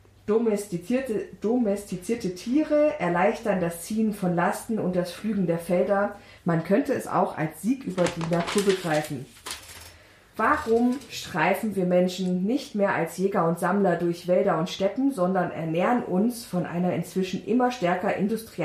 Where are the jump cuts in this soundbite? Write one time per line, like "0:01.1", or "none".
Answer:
0:06.4